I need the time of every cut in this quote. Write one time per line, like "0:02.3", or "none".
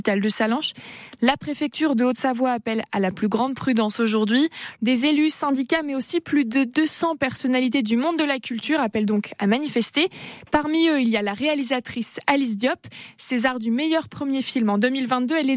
0:04.8